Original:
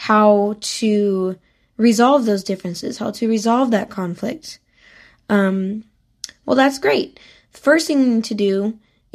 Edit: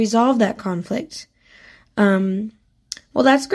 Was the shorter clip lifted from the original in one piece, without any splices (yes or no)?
yes